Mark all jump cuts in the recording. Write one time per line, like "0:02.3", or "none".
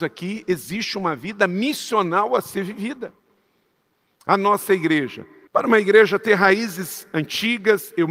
0:05.5